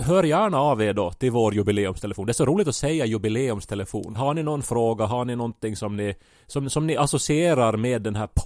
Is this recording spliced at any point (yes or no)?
yes